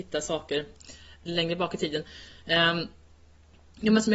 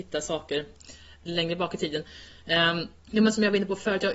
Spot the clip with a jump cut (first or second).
second